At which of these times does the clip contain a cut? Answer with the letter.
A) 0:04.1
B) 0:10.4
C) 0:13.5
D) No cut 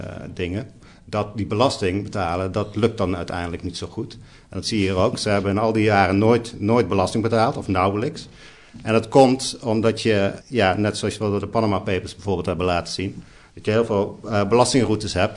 B